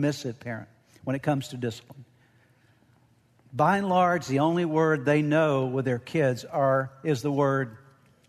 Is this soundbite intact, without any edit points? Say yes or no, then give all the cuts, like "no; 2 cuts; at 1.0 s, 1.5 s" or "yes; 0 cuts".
yes; 0 cuts